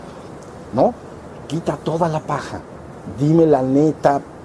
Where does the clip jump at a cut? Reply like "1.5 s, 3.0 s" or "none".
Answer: none